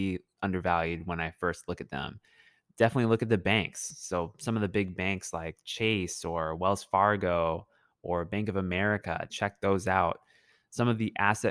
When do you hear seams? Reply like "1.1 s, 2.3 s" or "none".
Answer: 9.3 s